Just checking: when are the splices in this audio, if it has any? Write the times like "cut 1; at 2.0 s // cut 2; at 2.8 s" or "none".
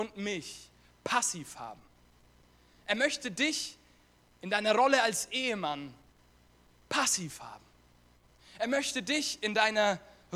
none